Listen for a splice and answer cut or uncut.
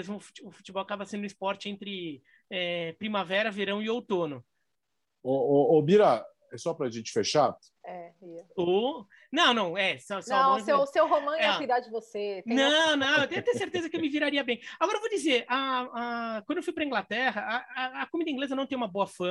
cut